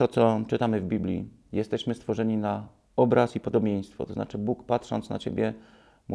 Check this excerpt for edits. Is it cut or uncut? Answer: uncut